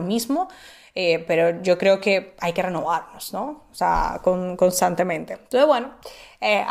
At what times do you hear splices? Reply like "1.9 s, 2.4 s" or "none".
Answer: none